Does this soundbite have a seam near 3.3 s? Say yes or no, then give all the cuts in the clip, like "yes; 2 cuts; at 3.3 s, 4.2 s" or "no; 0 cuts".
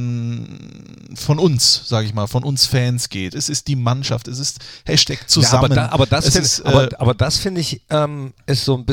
yes; 1 cut; at 3.3 s